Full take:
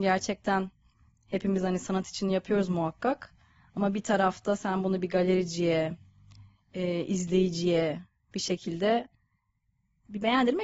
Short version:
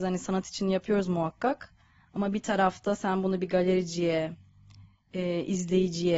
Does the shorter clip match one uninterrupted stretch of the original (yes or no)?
yes